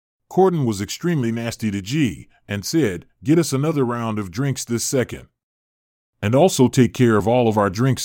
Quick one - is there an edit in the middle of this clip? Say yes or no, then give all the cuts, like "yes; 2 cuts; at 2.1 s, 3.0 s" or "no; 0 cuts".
no; 0 cuts